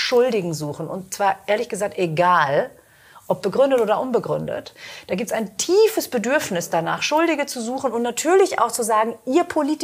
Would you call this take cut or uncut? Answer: uncut